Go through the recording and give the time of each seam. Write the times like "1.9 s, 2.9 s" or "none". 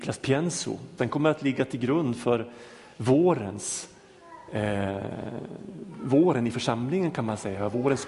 1.0 s